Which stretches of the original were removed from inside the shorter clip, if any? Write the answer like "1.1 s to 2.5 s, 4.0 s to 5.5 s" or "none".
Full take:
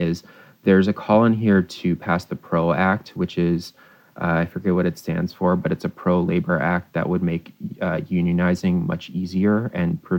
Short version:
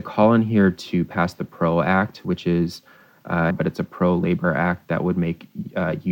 4.4 s to 5.6 s

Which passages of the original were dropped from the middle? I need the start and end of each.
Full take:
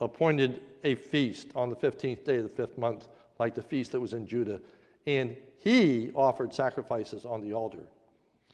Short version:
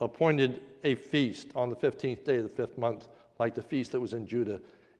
none

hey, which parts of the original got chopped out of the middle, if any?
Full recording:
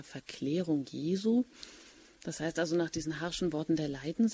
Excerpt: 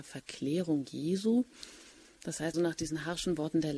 2.5 s to 2.7 s

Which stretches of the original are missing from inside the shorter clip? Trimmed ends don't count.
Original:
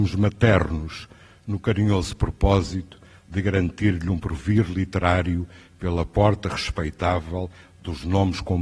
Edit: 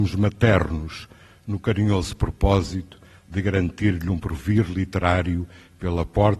none

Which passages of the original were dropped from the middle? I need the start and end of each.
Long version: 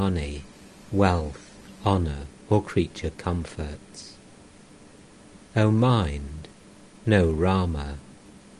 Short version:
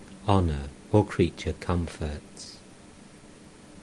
none

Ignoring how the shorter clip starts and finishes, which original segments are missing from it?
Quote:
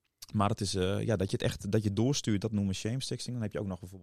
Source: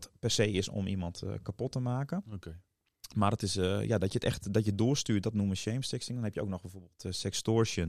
none

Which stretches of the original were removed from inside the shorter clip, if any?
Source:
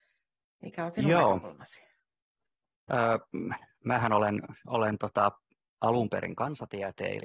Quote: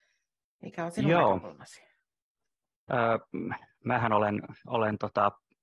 none

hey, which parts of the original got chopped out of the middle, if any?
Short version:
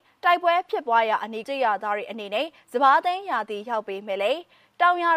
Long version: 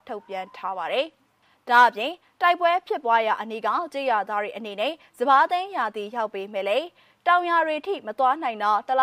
3.6 s to 3.9 s

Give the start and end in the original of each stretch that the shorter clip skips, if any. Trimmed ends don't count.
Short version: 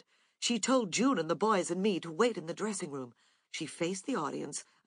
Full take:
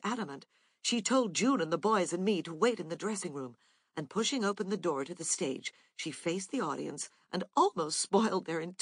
3.9 s to 5.9 s

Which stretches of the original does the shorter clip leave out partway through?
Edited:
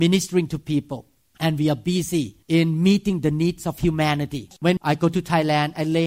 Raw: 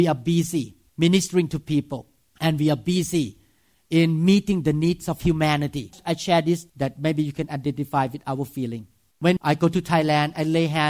3.4 s to 3.8 s, 6.0 s to 9.2 s

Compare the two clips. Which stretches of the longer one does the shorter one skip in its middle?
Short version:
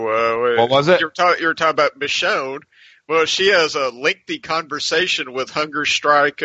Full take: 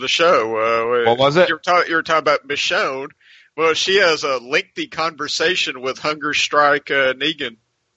none

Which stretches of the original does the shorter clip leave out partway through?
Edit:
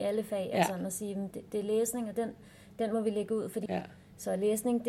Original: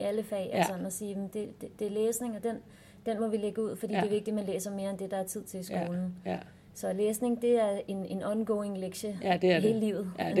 1.3 s to 1.6 s, 3.9 s to 6.2 s

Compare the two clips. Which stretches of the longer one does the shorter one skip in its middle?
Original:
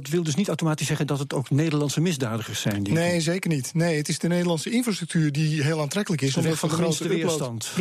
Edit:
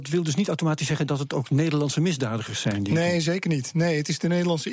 none

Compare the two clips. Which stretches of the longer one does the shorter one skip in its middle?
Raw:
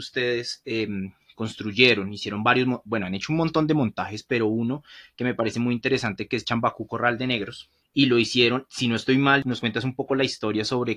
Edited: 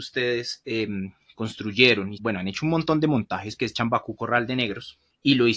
2.2 s to 2.8 s, 4.2 s to 6.3 s

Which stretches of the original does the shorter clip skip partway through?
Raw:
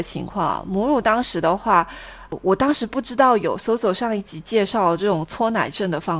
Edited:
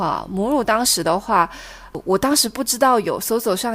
none

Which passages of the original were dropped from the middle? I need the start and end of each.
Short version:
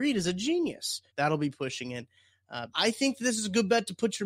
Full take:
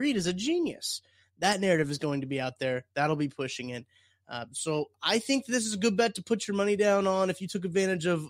1.1 s to 2.9 s, 4.5 s to 5.0 s

